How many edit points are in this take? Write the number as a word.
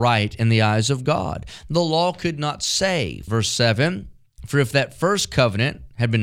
one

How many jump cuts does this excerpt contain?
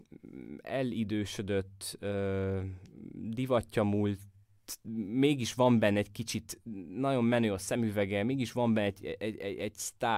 zero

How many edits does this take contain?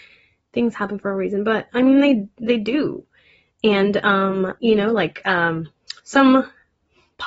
one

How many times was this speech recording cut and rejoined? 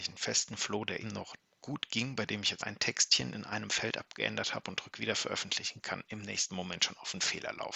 two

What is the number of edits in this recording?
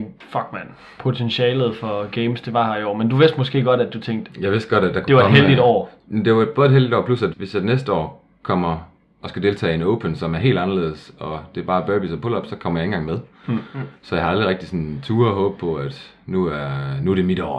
one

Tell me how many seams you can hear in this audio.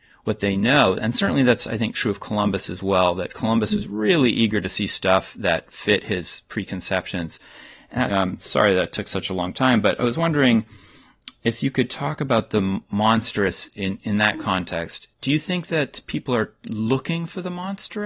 one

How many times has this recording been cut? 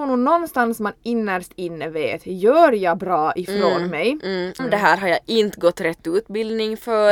one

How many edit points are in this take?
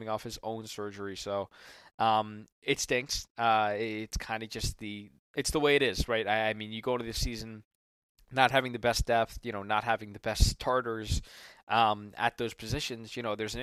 one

